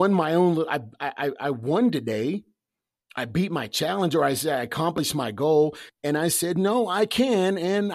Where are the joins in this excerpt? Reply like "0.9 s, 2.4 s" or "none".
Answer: 5.9 s